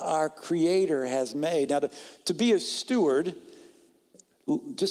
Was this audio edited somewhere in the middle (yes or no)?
no